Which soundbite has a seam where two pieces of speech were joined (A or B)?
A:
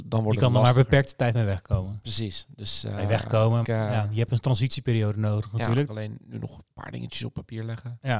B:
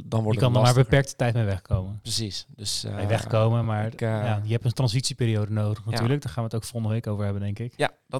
A